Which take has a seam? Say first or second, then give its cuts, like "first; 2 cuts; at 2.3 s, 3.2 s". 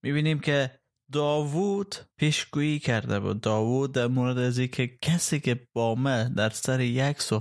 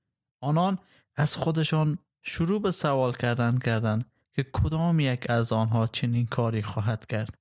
first; 1 cut; at 2.1 s